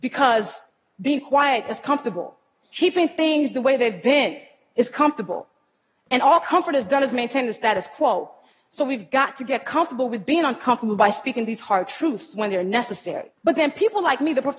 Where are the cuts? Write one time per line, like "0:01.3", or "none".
0:13.4